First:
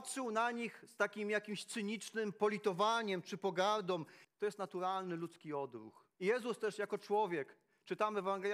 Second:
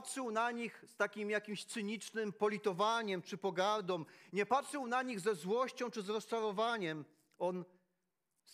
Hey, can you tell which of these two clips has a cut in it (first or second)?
first